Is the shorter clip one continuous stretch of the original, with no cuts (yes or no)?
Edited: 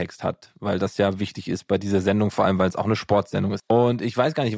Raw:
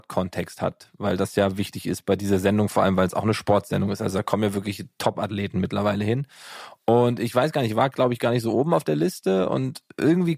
no